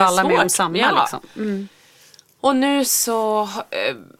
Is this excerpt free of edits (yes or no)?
no